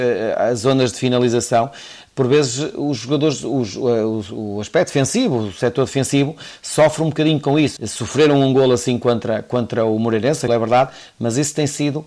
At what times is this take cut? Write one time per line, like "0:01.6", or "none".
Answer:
0:07.8
0:10.5